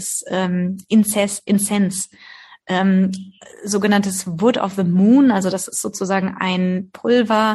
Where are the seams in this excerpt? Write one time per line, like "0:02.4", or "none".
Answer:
none